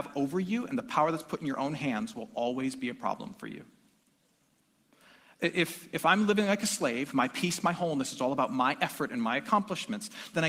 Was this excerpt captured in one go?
yes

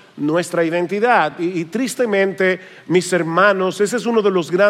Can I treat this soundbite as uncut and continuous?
yes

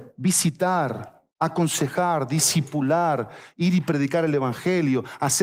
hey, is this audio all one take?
no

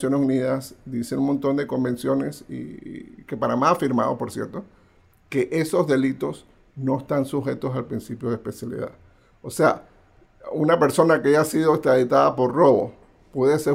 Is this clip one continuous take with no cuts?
yes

